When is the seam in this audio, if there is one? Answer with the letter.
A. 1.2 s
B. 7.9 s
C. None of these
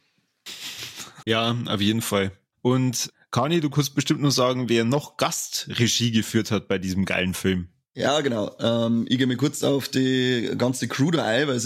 A